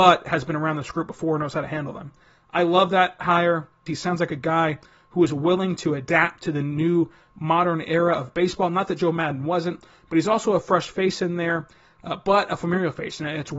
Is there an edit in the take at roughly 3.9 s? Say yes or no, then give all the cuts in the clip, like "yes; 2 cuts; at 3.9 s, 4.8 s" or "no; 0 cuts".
yes; 1 cut; at 3.9 s